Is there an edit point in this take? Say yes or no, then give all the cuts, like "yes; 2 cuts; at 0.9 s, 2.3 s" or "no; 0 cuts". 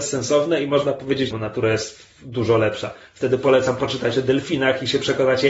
yes; 1 cut; at 1.3 s